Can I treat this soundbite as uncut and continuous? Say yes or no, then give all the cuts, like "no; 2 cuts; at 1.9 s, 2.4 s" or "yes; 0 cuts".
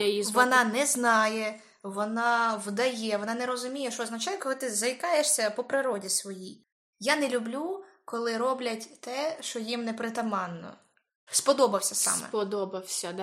no; 2 cuts; at 6.9 s, 11.3 s